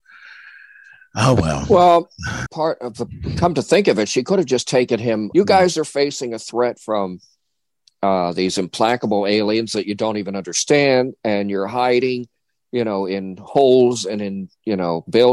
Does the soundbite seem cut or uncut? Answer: cut